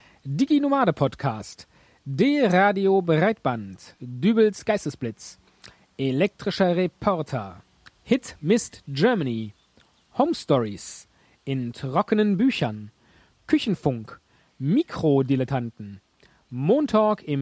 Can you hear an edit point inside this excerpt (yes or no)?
no